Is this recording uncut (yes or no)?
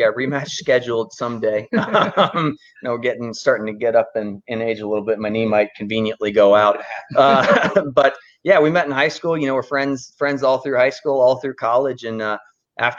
yes